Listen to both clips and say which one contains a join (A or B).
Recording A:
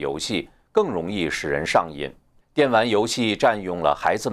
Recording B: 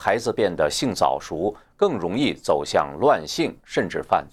A